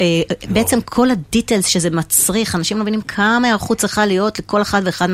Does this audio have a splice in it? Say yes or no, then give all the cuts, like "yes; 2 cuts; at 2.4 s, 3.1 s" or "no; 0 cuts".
no; 0 cuts